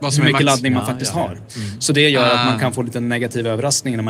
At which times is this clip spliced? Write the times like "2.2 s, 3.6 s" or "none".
none